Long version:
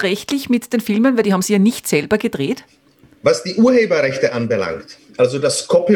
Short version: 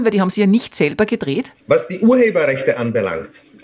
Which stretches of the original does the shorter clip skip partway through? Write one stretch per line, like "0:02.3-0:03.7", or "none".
0:02.7-0:03.2